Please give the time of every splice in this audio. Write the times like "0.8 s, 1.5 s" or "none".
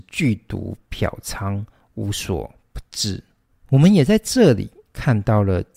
none